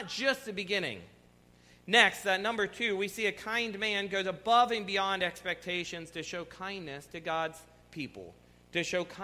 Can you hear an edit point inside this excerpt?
no; 0 cuts

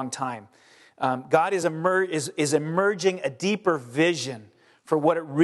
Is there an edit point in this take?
no; 0 cuts

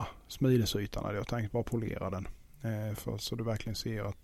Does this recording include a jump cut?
no; 0 cuts

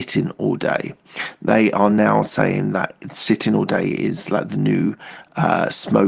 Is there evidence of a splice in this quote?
no; 0 cuts

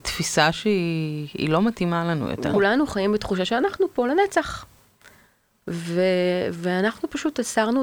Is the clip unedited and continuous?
no; 1 cut; at 2.5 s

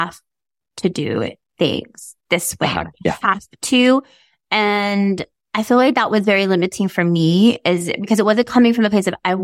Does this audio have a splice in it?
no; 0 cuts

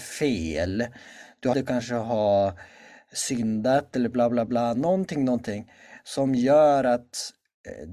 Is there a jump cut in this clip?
yes; 1 cut; at 1.5 s

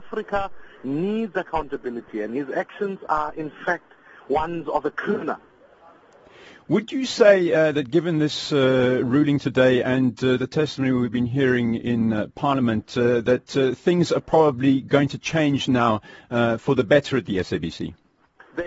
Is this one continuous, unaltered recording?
yes; 0 cuts

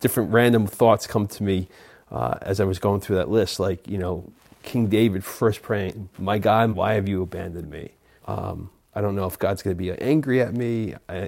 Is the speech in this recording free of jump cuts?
no; 2 cuts; at 6.7 s, 8.2 s

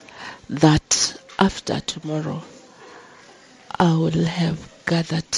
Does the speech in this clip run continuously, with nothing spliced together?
yes; 0 cuts

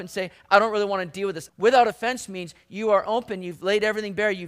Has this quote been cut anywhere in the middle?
yes; 1 cut; at 1.5 s

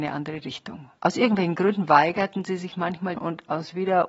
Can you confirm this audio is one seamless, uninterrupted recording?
no; 2 cuts; at 1.0 s, 3.1 s

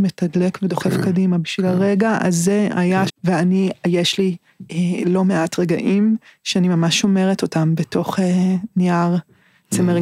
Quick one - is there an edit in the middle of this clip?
yes; 1 cut; at 3.1 s

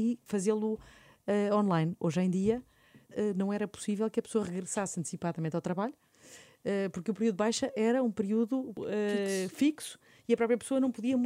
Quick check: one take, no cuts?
yes; 0 cuts

